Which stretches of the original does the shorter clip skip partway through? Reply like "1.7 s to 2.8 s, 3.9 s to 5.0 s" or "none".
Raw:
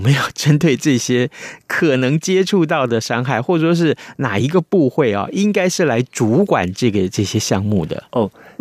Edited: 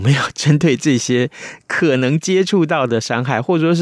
none